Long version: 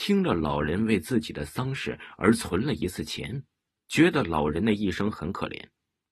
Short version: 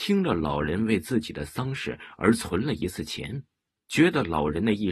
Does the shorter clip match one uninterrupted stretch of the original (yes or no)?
yes